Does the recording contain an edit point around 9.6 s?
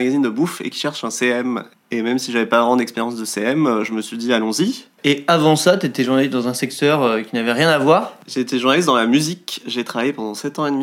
no; 2 cuts; at 1.7 s, 5.0 s

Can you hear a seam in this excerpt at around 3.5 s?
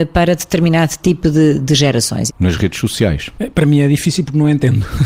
no; 1 cut; at 2.3 s

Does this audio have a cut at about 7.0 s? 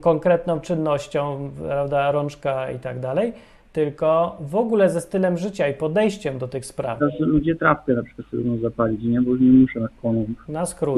yes; 1 cut; at 7.0 s

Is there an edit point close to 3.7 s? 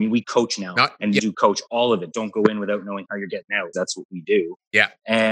yes; 2 cuts; at 1.2 s, 3.7 s

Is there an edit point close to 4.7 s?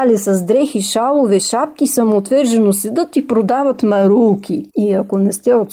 yes; 1 cut; at 4.7 s

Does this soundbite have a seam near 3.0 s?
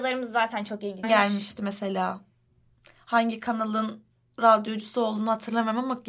no; 1 cut; at 1.0 s

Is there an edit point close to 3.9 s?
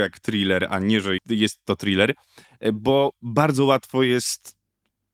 no; 1 cut; at 1.2 s

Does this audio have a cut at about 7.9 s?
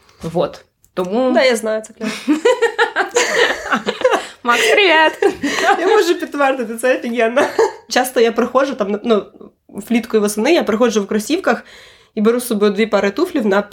yes; 1 cut; at 7.9 s

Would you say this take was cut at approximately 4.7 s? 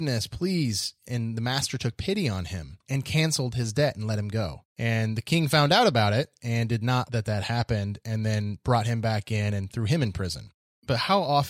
yes; 2 cuts; at 4.7 s, 7.1 s

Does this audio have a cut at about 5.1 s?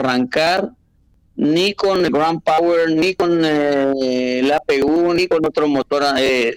no; 0 cuts

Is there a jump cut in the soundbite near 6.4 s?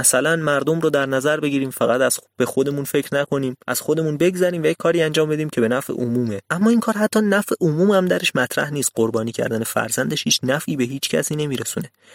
yes; 2 cuts; at 3.6 s, 6.4 s

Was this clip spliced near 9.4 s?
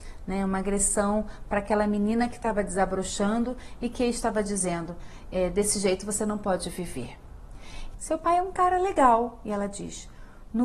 no; 1 cut; at 7.9 s

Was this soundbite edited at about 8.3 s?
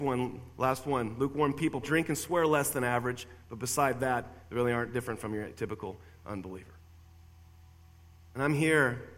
no; 1 cut; at 1.8 s

